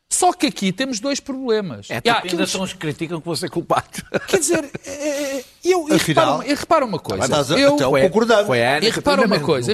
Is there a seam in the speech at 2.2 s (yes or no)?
yes